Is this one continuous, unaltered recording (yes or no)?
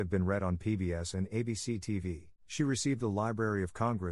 no